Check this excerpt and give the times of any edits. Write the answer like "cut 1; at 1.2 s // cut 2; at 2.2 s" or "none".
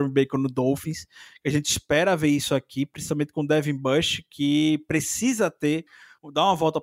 none